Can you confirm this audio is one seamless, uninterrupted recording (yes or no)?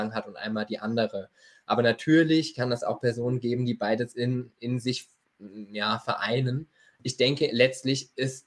yes